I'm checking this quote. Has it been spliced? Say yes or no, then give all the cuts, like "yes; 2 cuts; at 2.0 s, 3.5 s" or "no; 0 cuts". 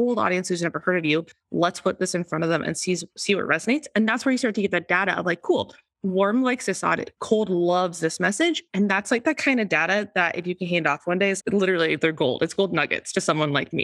yes; 2 cuts; at 7.2 s, 11.4 s